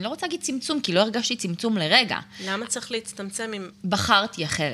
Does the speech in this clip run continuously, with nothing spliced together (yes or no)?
no